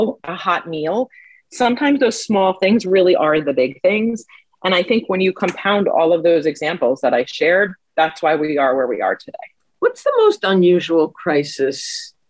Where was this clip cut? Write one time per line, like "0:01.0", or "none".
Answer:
none